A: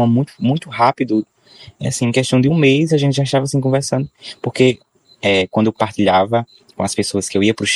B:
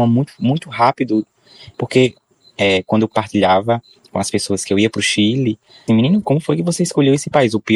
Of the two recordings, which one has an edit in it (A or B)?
B